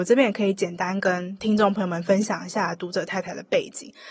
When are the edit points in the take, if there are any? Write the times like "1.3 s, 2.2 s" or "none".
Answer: none